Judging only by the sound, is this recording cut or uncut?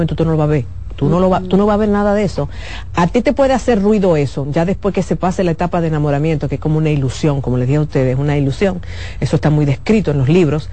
uncut